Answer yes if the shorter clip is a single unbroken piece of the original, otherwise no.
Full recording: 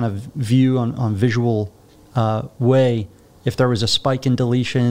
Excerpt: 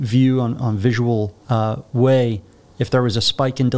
no